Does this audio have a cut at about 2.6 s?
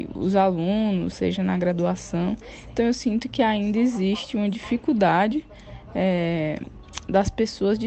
no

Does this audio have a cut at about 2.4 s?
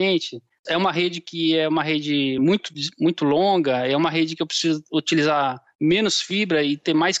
no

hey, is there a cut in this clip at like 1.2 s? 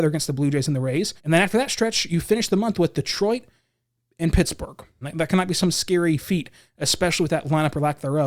yes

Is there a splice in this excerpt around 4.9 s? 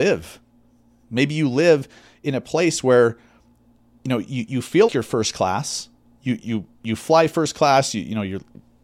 yes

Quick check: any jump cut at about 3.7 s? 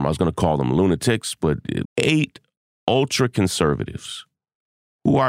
no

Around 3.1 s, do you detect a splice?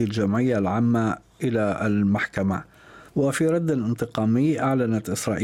yes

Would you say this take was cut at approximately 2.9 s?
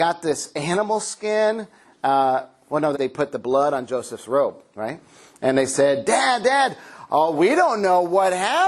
yes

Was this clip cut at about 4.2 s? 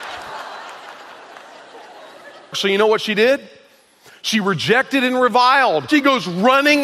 no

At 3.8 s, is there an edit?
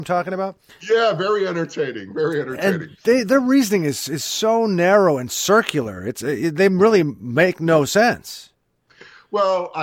no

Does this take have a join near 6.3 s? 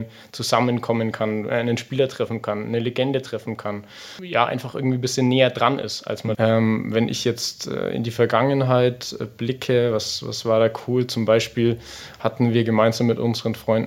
yes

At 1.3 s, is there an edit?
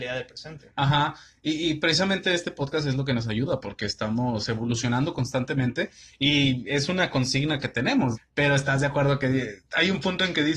no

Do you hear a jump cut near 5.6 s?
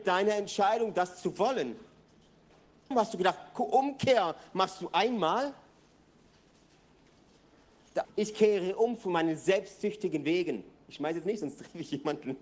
no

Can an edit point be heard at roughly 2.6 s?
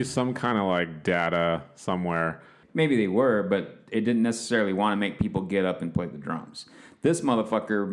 yes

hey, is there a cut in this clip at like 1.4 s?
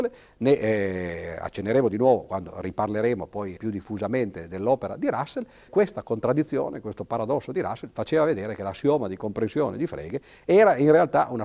no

